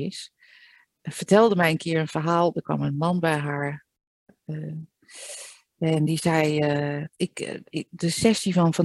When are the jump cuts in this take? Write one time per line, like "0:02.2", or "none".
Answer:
0:07.1